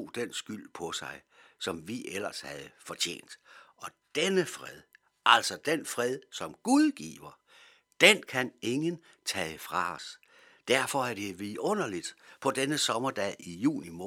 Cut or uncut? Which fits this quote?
uncut